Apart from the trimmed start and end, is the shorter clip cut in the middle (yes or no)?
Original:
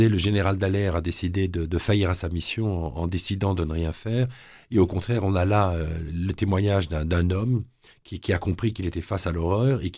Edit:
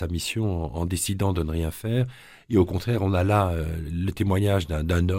no